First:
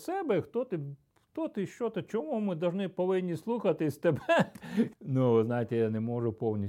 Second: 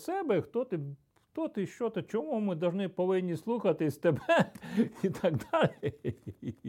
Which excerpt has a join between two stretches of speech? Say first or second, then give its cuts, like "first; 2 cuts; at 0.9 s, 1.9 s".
first; 1 cut; at 4.9 s